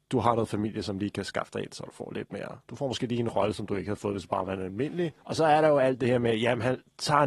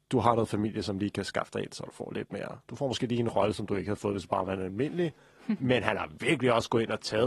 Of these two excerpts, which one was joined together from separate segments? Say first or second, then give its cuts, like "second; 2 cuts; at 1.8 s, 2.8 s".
first; 1 cut; at 5.2 s